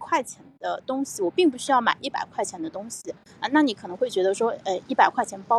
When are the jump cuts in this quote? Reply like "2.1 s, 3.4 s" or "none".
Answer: none